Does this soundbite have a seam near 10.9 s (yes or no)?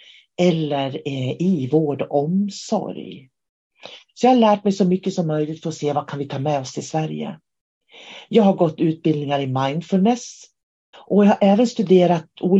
yes